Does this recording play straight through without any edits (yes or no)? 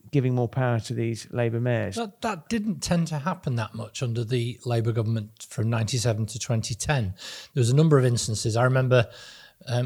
yes